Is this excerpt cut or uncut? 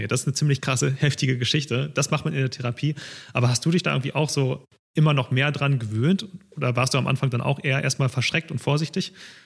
uncut